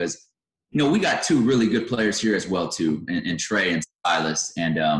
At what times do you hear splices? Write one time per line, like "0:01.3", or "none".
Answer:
none